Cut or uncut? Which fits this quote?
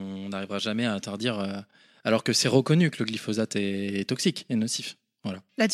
uncut